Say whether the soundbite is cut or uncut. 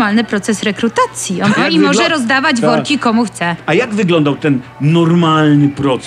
cut